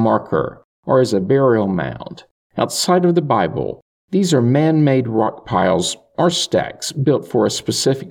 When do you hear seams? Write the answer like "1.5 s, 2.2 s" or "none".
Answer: 2.5 s, 4.0 s